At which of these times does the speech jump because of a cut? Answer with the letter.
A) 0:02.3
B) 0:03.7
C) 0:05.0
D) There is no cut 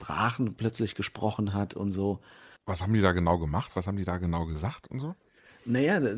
D